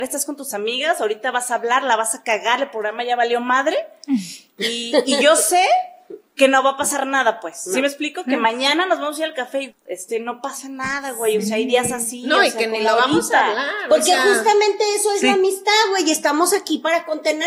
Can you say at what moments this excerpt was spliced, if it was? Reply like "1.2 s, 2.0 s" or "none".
9.7 s

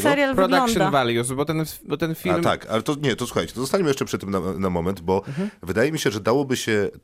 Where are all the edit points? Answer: 4.1 s

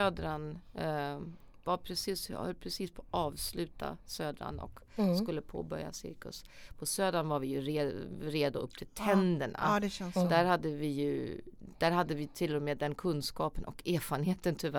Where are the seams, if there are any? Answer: 1.6 s

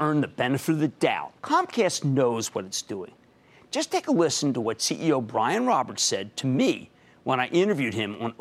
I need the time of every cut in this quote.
1.4 s

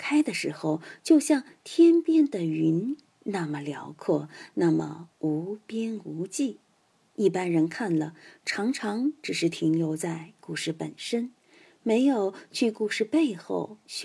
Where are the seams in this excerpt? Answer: 7.1 s

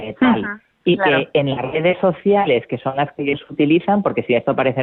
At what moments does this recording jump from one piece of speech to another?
none

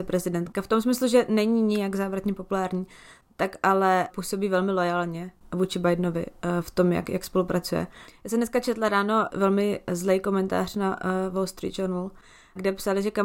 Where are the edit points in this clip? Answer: none

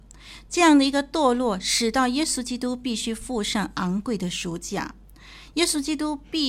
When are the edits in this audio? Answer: none

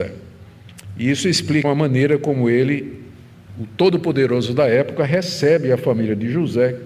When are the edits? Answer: 1.6 s

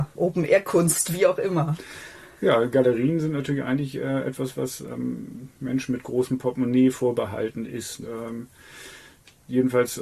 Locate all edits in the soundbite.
8.0 s

